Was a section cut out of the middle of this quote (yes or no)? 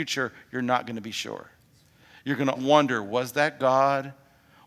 yes